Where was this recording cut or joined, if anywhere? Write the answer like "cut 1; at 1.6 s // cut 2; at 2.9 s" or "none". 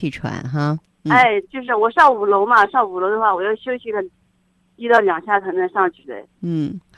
none